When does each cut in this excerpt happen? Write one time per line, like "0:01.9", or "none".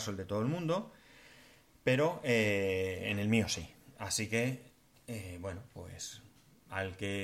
none